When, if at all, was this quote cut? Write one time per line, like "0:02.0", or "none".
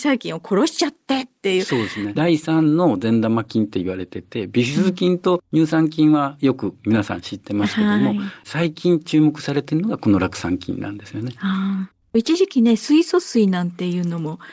0:02.2